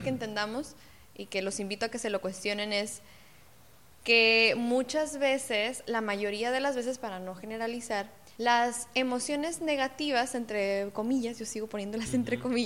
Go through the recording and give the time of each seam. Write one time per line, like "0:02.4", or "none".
0:08.3